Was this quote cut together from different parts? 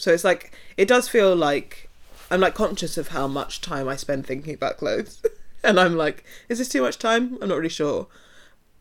no; 0 cuts

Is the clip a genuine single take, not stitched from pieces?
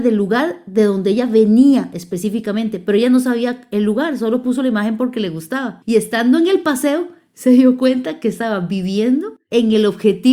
yes; 0 cuts

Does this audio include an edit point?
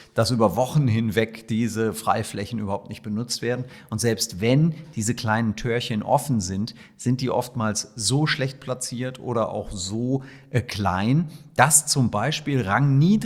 no; 0 cuts

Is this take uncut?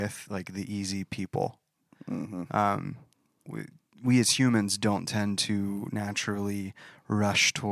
no; 1 cut; at 3.5 s

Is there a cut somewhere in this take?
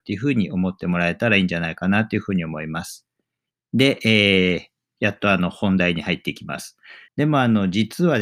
yes; 1 cut; at 7.1 s

